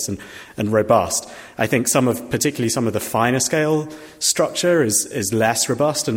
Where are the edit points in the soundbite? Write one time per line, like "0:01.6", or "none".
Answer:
none